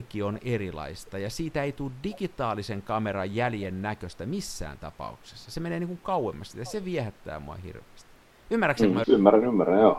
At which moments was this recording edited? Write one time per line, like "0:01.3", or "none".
0:09.0